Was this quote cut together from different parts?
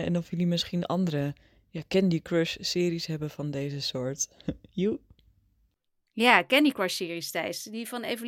no; 0 cuts

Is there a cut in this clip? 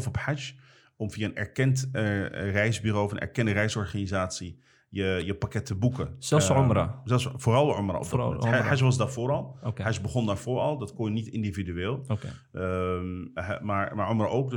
no; 0 cuts

